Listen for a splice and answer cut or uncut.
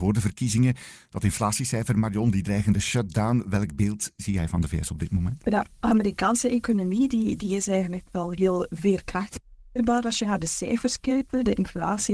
uncut